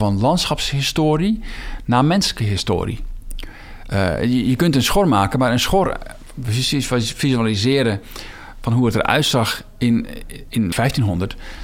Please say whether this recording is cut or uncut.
cut